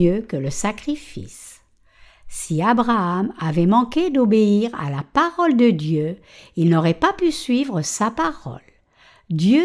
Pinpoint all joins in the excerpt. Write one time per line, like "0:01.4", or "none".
none